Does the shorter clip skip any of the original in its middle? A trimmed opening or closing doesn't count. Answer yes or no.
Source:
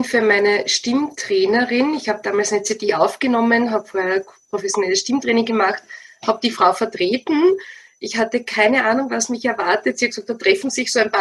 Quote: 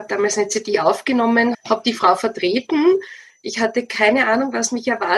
yes